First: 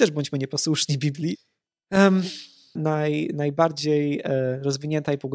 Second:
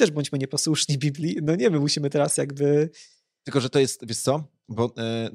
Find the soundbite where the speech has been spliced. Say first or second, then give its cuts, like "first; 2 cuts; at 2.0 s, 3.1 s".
first; 2 cuts; at 1.3 s, 2.8 s